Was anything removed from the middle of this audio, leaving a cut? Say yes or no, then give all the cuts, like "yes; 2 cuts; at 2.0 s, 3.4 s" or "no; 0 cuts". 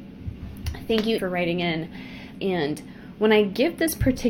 yes; 2 cuts; at 1.2 s, 2.3 s